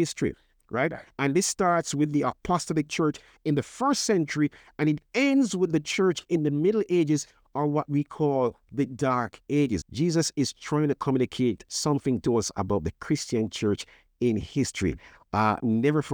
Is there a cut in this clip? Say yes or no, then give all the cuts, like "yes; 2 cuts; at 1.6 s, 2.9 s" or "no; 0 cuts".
yes; 1 cut; at 9.8 s